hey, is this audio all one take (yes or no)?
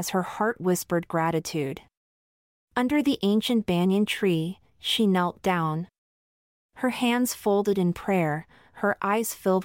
yes